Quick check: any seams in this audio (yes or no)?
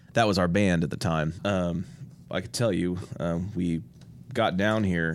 yes